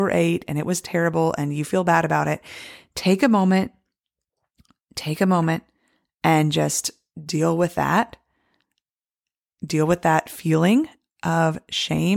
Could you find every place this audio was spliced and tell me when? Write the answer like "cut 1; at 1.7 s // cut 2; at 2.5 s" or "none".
none